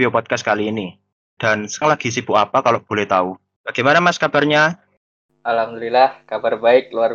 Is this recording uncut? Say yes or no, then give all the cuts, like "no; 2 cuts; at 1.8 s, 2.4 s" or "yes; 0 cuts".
no; 2 cuts; at 1.4 s, 3.6 s